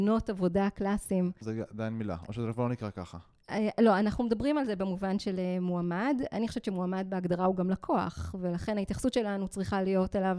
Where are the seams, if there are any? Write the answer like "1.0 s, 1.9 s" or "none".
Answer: 1.4 s